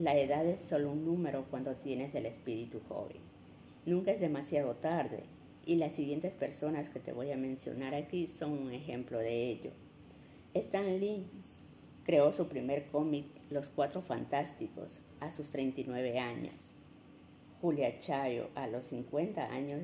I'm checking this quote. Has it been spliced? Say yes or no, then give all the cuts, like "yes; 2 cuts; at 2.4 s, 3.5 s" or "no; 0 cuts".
no; 0 cuts